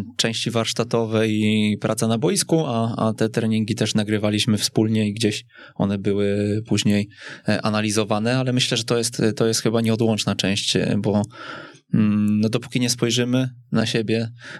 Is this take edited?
no; 0 cuts

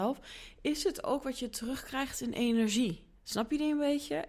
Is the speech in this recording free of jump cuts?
no; 1 cut; at 3.2 s

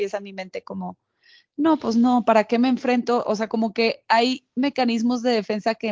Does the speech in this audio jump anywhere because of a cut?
no; 0 cuts

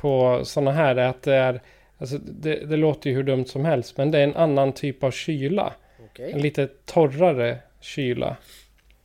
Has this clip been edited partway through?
no; 0 cuts

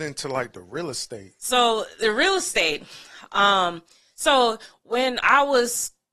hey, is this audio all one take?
no; 1 cut; at 1.4 s

